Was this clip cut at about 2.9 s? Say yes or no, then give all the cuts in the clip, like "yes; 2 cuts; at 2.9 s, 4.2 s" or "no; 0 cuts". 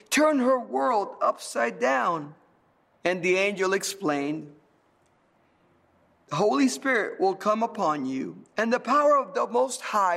yes; 1 cut; at 2.9 s